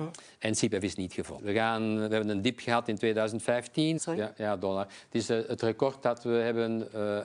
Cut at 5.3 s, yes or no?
no